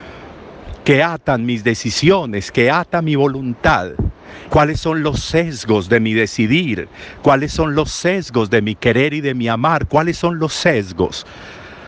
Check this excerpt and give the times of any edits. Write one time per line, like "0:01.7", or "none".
0:04.5